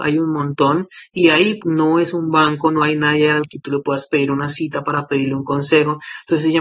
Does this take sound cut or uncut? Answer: cut